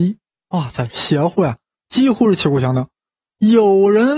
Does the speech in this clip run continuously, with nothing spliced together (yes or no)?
yes